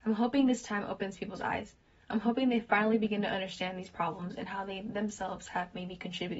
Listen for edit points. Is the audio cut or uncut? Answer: uncut